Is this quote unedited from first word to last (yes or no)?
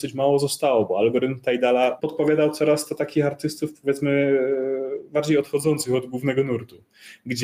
no